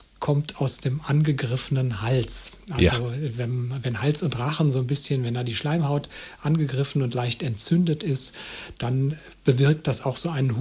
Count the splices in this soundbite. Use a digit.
0